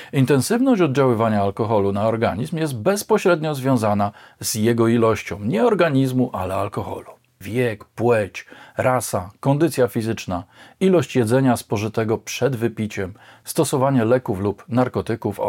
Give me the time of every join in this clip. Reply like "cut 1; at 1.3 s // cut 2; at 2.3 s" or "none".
cut 1; at 7.4 s